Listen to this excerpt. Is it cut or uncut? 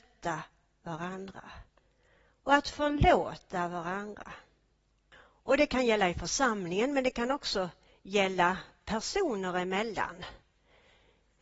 uncut